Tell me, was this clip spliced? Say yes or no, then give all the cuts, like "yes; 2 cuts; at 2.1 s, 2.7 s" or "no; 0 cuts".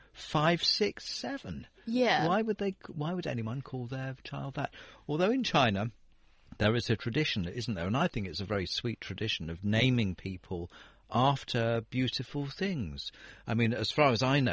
no; 0 cuts